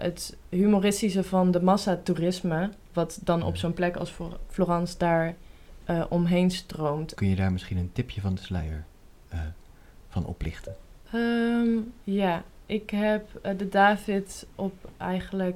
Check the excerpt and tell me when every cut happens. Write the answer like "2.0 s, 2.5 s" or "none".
7.2 s